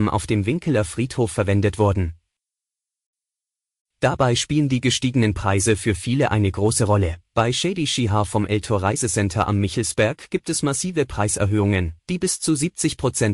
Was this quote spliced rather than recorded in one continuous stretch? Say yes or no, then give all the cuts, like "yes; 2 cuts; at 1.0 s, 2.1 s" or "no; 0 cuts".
yes; 3 cuts; at 3.8 s, 7.3 s, 12.0 s